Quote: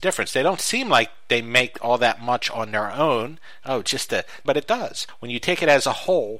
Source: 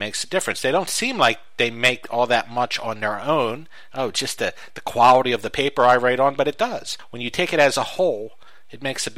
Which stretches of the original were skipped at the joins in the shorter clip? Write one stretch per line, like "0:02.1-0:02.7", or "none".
0:04.7-0:06.4